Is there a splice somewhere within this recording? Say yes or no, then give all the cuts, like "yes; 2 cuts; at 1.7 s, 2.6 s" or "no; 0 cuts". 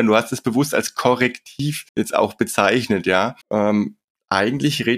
yes; 2 cuts; at 1.9 s, 3.4 s